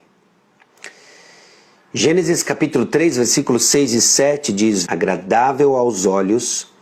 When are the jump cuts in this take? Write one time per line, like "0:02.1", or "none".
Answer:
0:04.9